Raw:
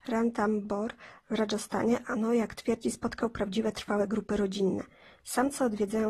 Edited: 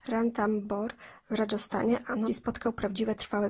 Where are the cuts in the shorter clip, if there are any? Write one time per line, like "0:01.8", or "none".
0:02.3